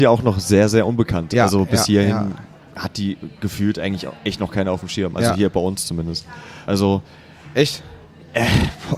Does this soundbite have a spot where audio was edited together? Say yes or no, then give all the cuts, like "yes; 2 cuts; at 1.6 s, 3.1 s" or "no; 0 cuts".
yes; 1 cut; at 6.7 s